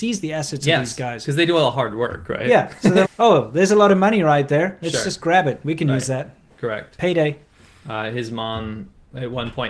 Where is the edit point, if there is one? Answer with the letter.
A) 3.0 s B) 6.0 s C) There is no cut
A